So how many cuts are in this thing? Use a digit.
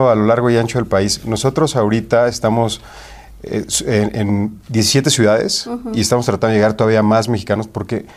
0